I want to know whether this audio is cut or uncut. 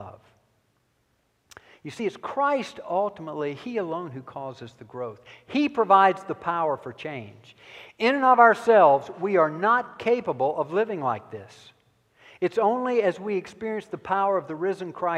uncut